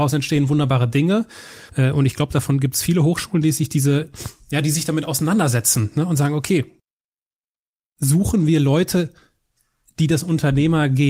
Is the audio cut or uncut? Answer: cut